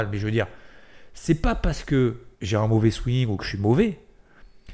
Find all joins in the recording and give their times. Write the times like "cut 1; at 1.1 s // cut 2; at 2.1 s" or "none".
cut 1; at 2.3 s

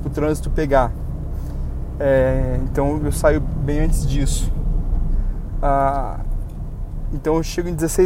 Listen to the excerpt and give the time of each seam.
none

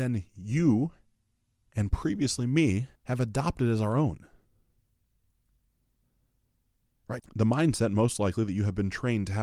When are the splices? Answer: cut 1; at 3.0 s // cut 2; at 7.2 s

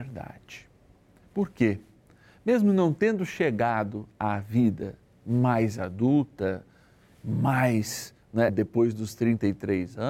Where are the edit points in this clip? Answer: cut 1; at 8.5 s

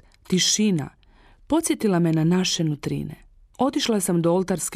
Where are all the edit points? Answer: cut 1; at 3.5 s

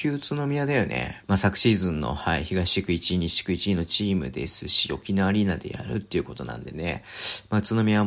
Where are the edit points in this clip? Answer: cut 1; at 1.2 s

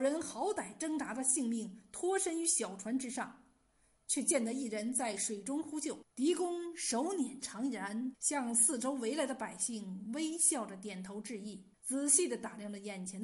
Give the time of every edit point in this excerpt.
cut 1; at 6.0 s // cut 2; at 8.1 s // cut 3; at 11.7 s

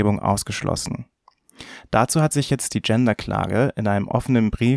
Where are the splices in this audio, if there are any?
none

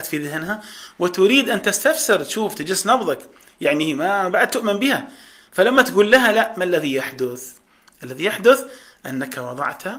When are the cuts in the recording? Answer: none

